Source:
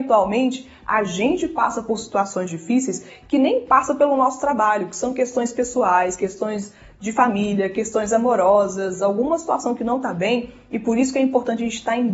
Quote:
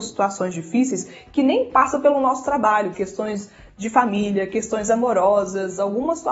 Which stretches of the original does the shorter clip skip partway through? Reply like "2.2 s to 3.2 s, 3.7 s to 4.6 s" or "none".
4.9 s to 6.2 s